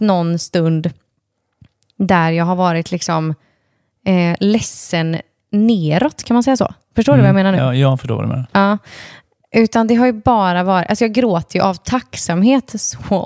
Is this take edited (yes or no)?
no